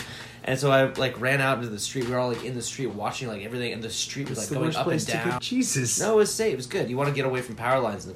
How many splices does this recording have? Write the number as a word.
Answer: one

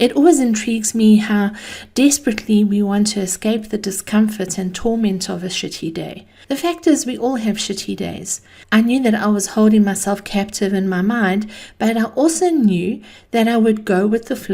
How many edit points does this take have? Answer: two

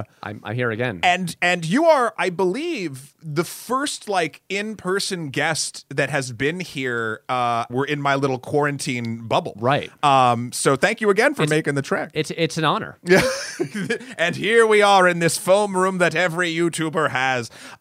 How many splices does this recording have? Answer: one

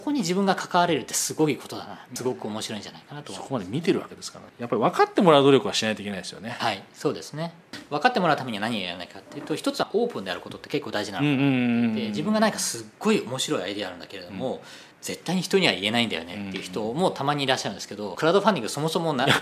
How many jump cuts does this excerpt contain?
one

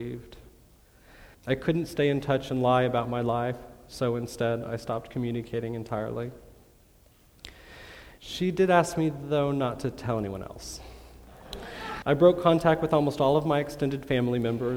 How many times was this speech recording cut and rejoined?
three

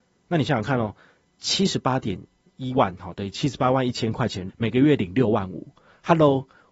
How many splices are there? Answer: one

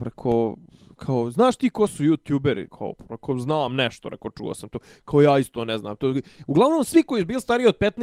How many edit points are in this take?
one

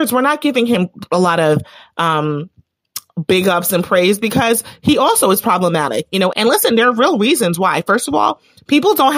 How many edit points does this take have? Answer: one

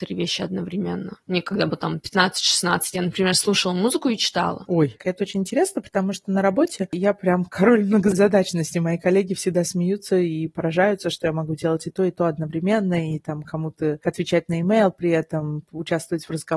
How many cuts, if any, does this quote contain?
one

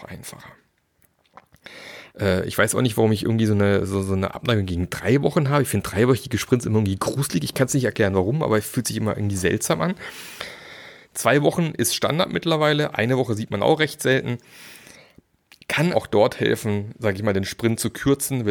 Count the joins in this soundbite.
two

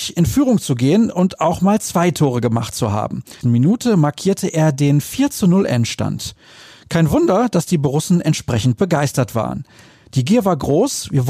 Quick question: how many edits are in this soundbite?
one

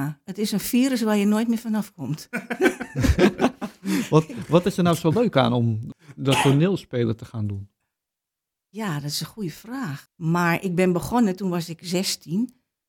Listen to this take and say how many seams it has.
one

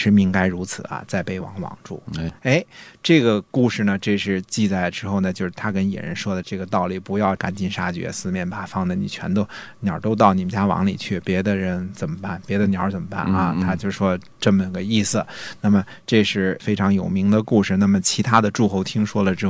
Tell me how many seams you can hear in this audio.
zero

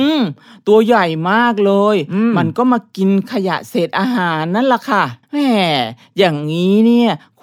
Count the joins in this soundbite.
one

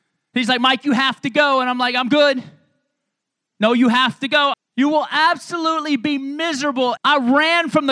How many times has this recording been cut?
two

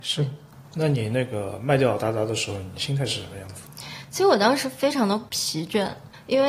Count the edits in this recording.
zero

